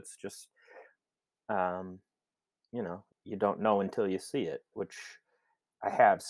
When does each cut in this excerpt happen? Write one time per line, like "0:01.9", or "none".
0:03.1
0:04.7